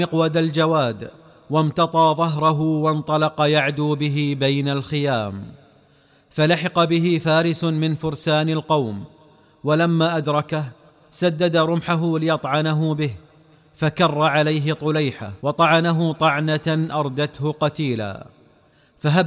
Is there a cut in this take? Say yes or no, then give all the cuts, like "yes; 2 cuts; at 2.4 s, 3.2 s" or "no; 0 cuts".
yes; 1 cut; at 15.4 s